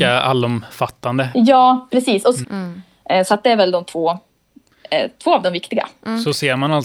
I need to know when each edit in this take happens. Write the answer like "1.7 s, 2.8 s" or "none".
1.3 s, 2.4 s